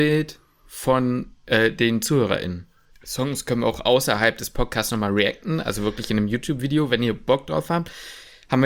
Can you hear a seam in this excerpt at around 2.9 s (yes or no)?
yes